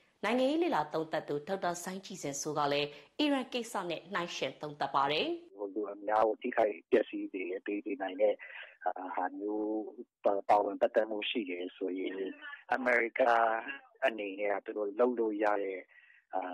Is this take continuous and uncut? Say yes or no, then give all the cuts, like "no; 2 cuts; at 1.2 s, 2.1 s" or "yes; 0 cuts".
yes; 0 cuts